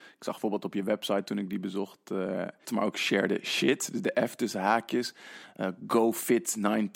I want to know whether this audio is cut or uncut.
cut